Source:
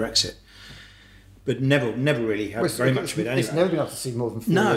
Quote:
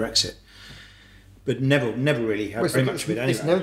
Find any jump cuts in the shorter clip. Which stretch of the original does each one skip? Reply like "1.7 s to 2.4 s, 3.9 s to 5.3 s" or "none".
2.7 s to 2.8 s